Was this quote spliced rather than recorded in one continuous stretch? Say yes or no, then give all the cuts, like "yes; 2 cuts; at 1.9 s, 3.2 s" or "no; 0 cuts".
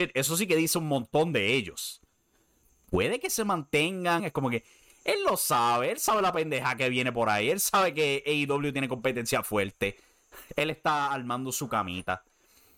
yes; 1 cut; at 4.2 s